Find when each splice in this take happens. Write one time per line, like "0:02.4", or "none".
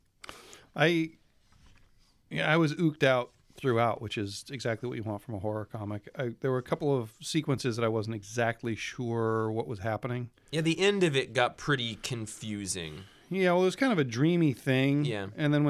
none